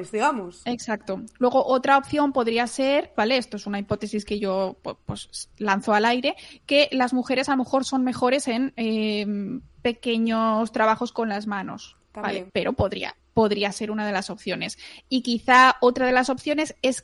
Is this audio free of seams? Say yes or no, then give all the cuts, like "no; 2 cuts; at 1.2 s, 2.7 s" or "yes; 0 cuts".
no; 2 cuts; at 3.2 s, 12.5 s